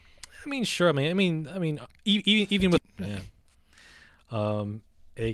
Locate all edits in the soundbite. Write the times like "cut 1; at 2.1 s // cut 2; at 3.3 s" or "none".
cut 1; at 2.8 s

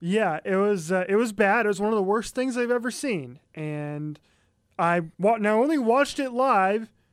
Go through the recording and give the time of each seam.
cut 1; at 5.1 s

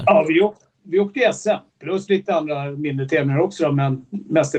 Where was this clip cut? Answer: cut 1; at 1.7 s

